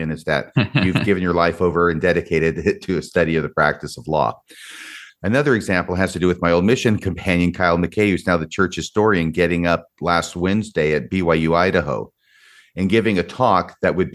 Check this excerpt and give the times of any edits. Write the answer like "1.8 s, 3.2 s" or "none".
5.1 s

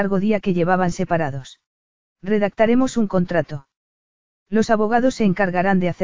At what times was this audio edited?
2.0 s

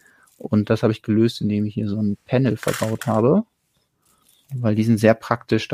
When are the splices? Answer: none

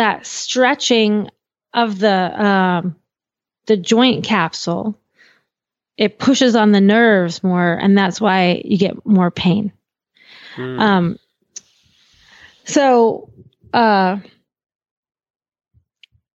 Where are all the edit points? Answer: none

